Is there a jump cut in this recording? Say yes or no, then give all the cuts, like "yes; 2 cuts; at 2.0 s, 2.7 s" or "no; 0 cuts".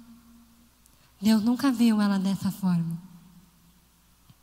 no; 0 cuts